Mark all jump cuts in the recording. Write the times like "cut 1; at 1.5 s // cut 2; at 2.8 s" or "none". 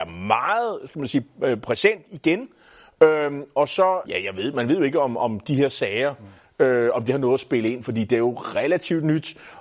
cut 1; at 4.0 s